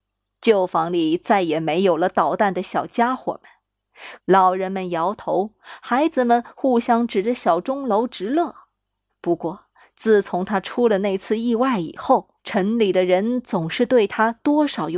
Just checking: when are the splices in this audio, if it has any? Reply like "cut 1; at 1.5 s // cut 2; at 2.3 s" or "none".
cut 1; at 4.2 s // cut 2; at 9.1 s // cut 3; at 12.4 s